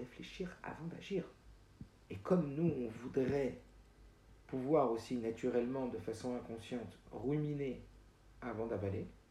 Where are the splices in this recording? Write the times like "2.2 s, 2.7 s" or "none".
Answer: 2.1 s